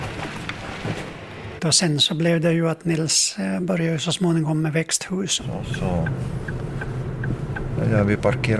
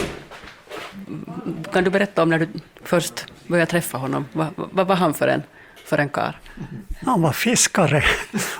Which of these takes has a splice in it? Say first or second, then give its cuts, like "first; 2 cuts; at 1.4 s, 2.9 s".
first; 2 cuts; at 1.6 s, 5.4 s